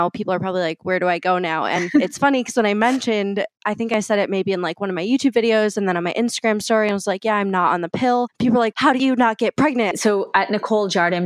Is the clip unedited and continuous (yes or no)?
no